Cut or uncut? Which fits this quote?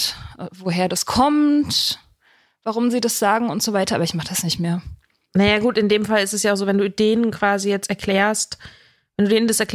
uncut